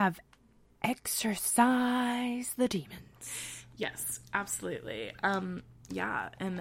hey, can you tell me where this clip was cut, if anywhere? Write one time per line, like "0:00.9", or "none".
none

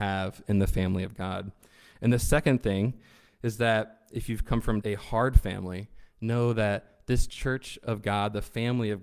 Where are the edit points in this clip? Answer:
0:04.8

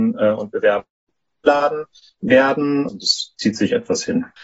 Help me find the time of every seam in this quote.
0:02.9

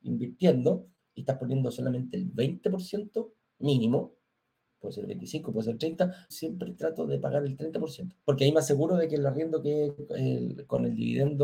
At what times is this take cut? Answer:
0:06.3
0:08.2

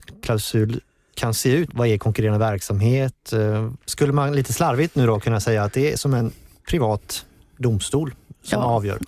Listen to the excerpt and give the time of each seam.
0:01.7
0:03.8

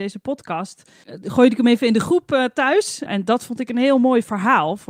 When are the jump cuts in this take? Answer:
0:01.0
0:03.1

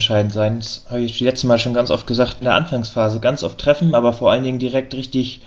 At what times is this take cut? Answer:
0:02.4

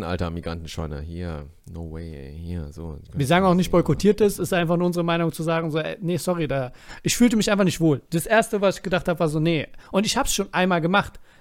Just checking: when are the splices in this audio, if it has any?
0:01.6

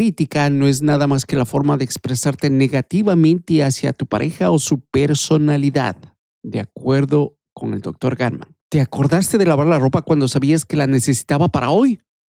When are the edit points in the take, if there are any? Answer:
0:08.6

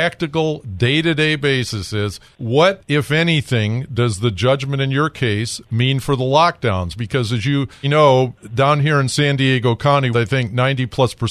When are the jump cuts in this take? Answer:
0:07.8
0:10.1

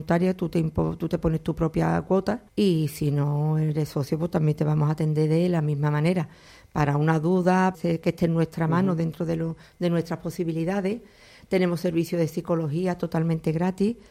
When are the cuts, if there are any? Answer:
0:02.5
0:07.7

